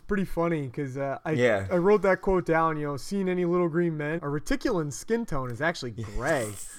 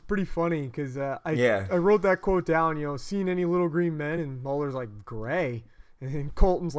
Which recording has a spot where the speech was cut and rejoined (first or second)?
first